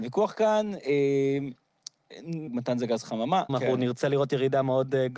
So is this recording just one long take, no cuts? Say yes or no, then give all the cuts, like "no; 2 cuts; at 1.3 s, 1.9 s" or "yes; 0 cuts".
no; 2 cuts; at 2.5 s, 3.5 s